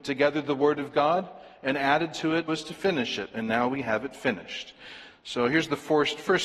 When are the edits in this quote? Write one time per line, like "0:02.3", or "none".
0:02.5
0:05.1